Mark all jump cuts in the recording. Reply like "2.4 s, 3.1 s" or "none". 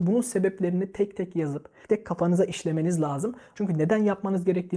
1.8 s, 3.5 s

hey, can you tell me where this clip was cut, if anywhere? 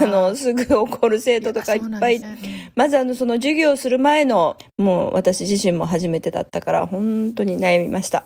2.2 s, 4.6 s

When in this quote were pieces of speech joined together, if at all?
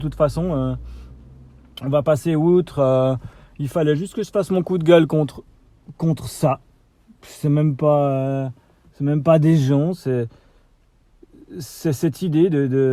none

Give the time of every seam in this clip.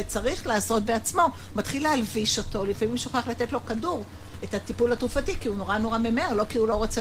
none

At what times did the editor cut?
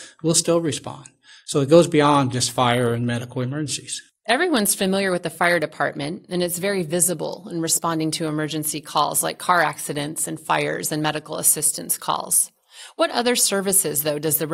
none

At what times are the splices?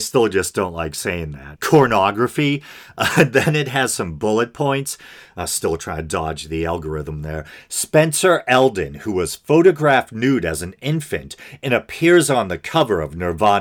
1.5 s

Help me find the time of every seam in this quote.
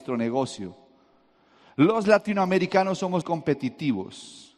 3.2 s

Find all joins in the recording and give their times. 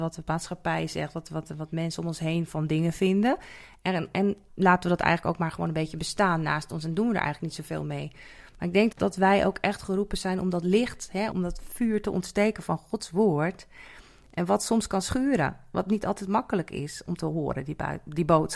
4.5 s, 8.9 s, 11.3 s

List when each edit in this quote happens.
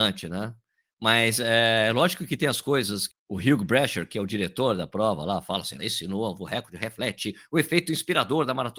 3.1 s, 5.8 s

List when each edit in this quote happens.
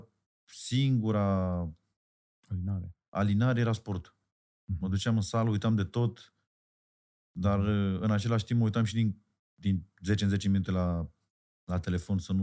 none

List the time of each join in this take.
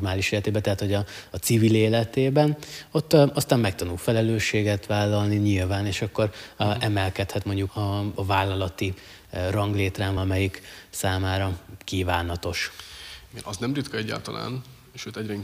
7.7 s, 10.2 s

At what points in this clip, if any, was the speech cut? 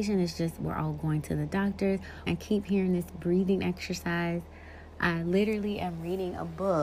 2.3 s

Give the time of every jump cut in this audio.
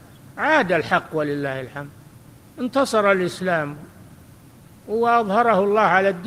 none

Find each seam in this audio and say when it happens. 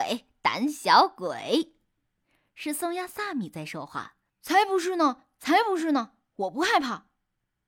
4.3 s

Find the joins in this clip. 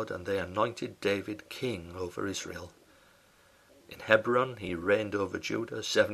3.7 s

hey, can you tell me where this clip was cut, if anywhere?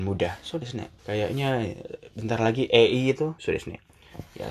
1.0 s, 3.4 s

